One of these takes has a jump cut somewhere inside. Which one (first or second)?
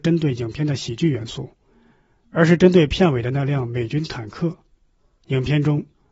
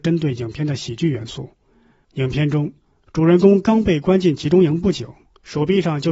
second